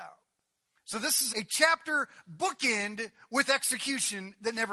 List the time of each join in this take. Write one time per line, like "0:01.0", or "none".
0:01.3